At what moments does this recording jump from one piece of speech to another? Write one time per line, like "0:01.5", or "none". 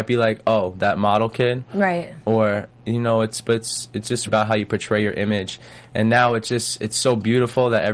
0:04.3